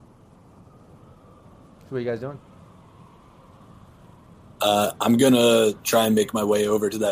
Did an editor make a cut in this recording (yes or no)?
no